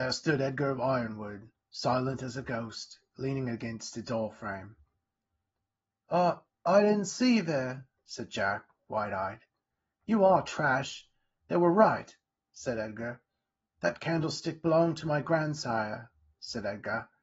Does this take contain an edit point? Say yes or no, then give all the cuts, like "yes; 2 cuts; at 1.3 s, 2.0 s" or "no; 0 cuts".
no; 0 cuts